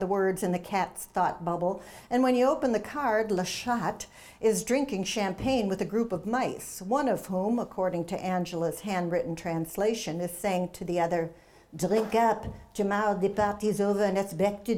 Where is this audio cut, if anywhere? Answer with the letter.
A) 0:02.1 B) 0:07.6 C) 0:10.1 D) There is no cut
D